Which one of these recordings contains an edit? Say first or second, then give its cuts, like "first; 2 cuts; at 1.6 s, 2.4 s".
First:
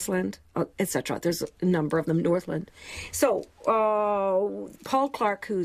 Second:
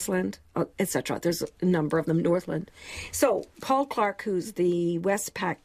second; 1 cut; at 3.5 s